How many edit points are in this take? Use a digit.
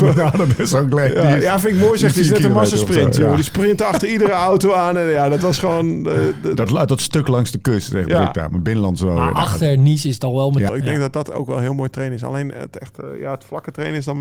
1